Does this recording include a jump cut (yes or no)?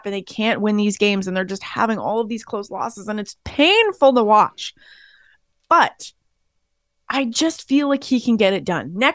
no